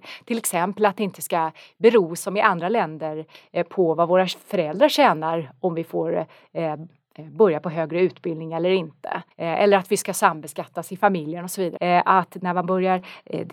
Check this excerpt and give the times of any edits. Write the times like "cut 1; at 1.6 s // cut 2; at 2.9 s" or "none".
cut 1; at 9.3 s // cut 2; at 11.8 s

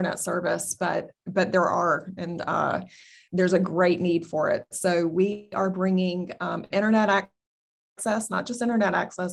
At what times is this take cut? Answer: none

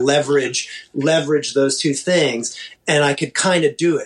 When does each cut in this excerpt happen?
cut 1; at 2.8 s

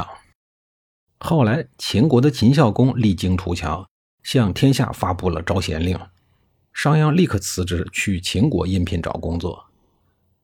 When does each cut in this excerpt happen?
none

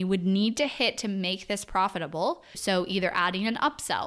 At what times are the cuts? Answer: cut 1; at 2.5 s

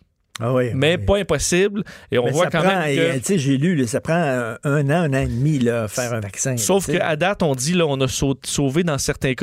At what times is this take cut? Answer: none

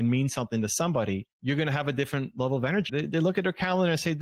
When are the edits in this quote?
cut 1; at 1.3 s // cut 2; at 2.9 s

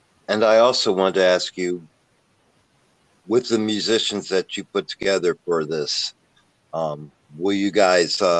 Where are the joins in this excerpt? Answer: none

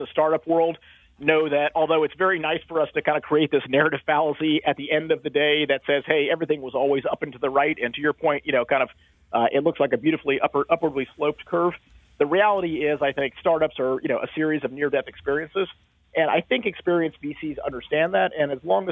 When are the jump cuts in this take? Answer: none

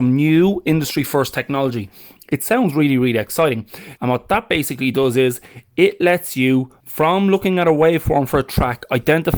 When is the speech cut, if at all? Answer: cut 1; at 4.0 s // cut 2; at 6.8 s

